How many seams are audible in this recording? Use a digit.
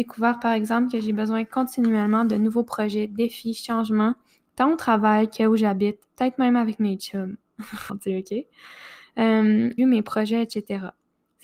2